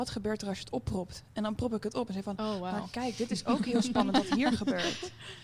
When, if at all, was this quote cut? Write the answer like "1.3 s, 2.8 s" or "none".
none